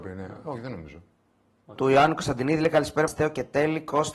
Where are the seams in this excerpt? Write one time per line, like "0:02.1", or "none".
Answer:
0:01.8
0:03.1